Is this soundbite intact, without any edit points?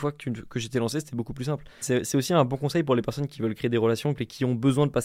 no; 2 cuts; at 1.8 s, 4.2 s

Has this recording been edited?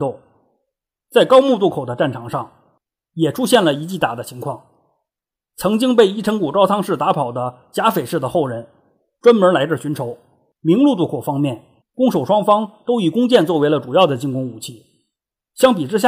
yes; 2 cuts; at 10.6 s, 11.8 s

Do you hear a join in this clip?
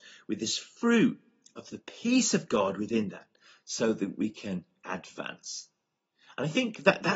no; 0 cuts

